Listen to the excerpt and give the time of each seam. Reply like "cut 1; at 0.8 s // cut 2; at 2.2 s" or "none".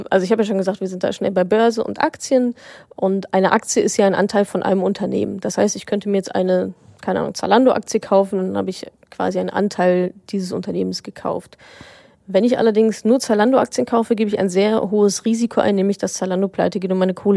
none